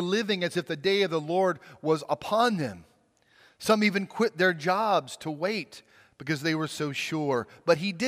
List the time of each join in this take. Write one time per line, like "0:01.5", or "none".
none